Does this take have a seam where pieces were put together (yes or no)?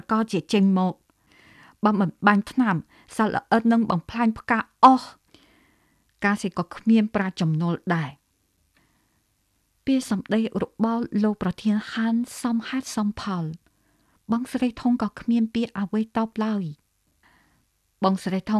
yes